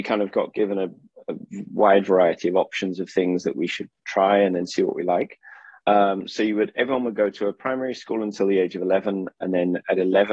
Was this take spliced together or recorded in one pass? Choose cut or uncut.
cut